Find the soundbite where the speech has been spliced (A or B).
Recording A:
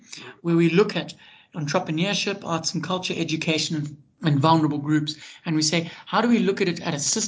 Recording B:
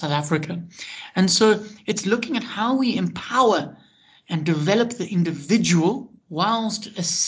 B